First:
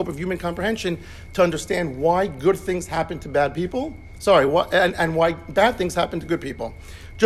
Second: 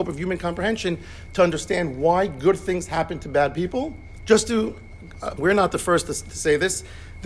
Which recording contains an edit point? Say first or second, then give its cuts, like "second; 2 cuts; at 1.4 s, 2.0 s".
second; 2 cuts; at 4.2 s, 5.4 s